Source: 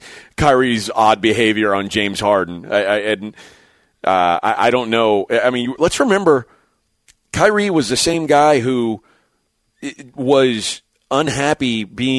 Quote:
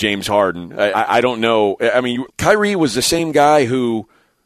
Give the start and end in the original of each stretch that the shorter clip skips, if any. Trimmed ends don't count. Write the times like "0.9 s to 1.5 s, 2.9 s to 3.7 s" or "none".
2.8 s to 4.4 s, 5.8 s to 7.2 s